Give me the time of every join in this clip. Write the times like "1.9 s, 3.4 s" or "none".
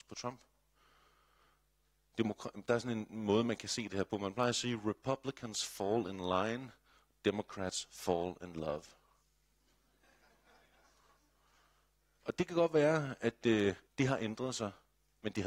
13.9 s